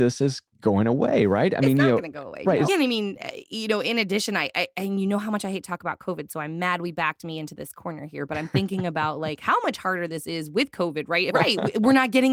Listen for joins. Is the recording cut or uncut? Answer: cut